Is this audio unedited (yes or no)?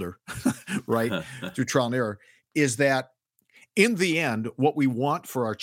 yes